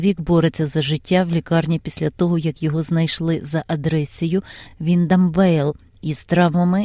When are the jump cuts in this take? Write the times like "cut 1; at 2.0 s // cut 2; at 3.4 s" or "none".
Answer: none